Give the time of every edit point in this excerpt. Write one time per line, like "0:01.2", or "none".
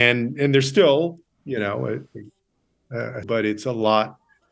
0:03.2